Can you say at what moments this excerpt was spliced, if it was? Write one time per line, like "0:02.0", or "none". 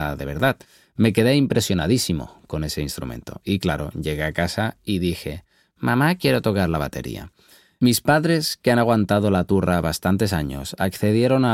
none